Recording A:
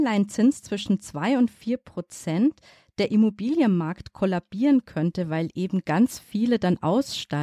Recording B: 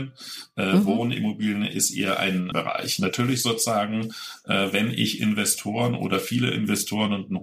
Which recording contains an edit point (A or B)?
B